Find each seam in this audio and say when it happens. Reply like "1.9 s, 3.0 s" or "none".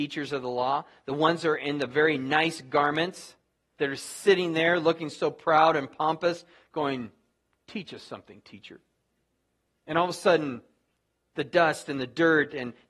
none